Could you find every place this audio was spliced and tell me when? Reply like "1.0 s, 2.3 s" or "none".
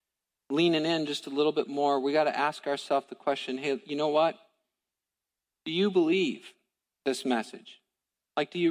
none